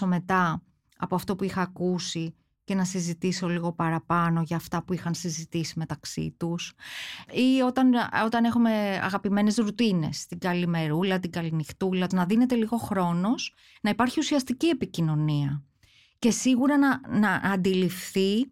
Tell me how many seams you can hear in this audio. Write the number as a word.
one